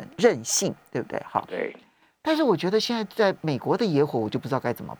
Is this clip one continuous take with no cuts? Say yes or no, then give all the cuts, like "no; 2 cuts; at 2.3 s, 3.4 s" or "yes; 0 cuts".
yes; 0 cuts